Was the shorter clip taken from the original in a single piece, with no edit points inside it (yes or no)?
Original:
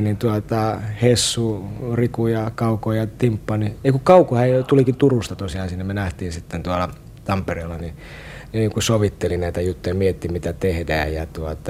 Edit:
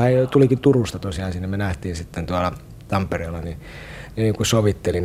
yes